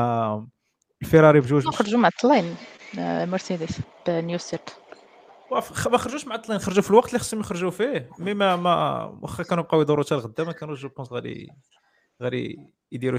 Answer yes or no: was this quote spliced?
yes